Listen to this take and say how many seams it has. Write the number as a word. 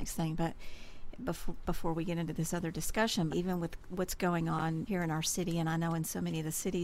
two